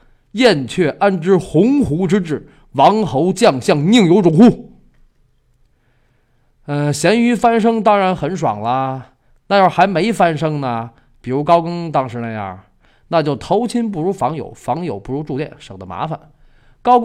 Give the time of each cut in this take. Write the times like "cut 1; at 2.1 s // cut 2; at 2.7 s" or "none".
none